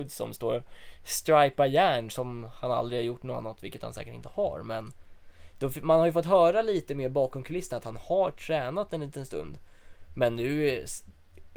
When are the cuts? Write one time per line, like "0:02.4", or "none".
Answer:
none